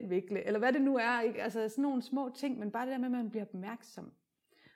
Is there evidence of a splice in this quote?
no; 0 cuts

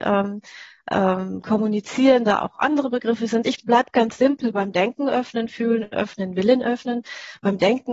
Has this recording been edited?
no; 0 cuts

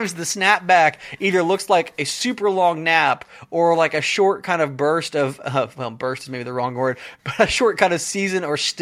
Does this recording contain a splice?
no; 0 cuts

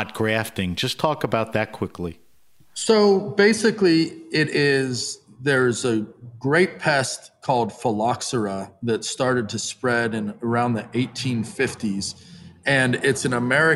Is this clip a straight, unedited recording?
yes; 0 cuts

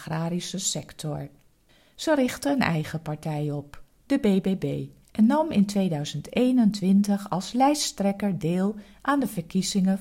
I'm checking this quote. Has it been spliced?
yes; 1 cut; at 5.0 s

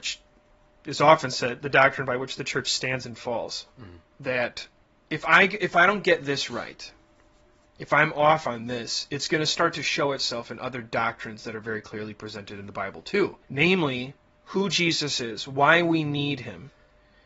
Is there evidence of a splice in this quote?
yes; 2 cuts; at 4.0 s, 13.4 s

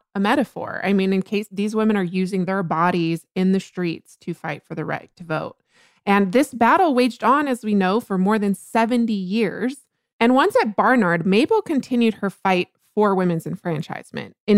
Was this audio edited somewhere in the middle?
no; 0 cuts

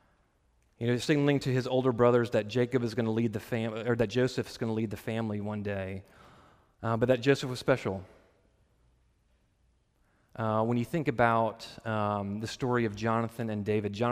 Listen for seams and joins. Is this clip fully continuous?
yes; 0 cuts

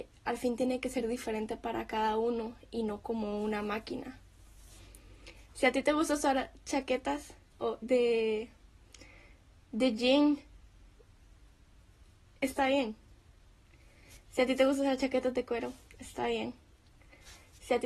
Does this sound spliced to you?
yes; 1 cut; at 7.8 s

